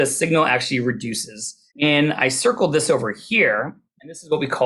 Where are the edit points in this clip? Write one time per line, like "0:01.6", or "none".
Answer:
0:01.7